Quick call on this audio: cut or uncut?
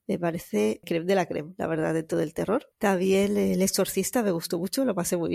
uncut